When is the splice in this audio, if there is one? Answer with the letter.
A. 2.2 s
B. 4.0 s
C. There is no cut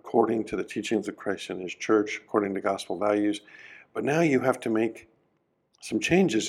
C